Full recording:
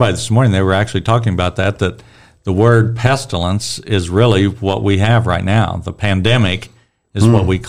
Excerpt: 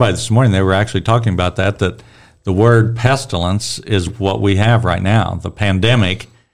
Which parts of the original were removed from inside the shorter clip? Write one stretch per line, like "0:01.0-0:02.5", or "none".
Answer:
0:04.1-0:04.5